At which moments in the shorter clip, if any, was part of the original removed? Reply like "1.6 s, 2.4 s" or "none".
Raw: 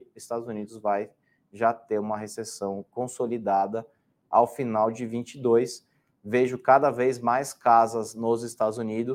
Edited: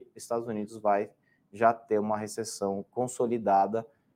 none